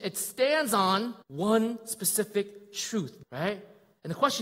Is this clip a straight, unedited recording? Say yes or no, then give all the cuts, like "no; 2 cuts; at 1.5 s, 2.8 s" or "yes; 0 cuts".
no; 2 cuts; at 1.2 s, 3.2 s